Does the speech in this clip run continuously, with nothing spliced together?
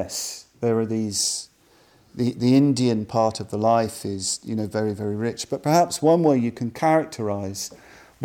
yes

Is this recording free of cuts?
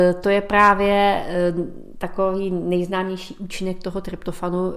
yes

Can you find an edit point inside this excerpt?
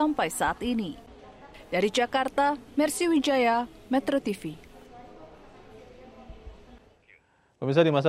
no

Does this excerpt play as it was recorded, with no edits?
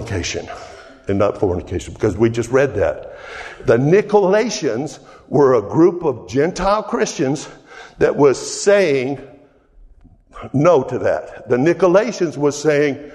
yes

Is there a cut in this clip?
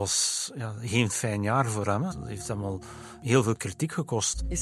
yes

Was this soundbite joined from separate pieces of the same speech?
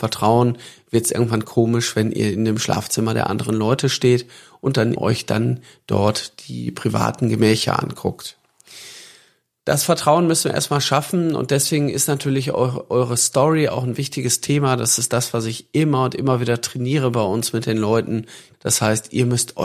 yes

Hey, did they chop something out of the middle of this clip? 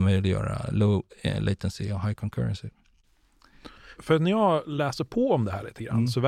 no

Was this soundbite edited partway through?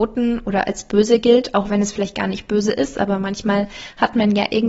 no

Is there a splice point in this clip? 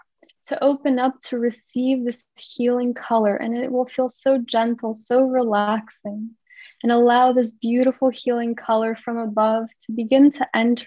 no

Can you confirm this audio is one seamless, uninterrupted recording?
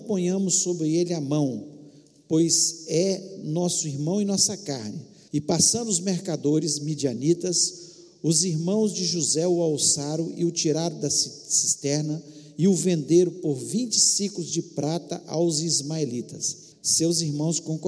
no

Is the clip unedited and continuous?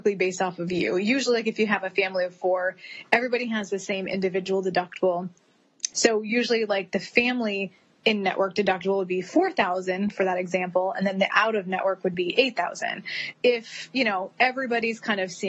no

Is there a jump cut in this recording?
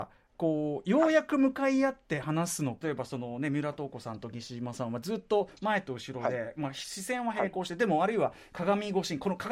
yes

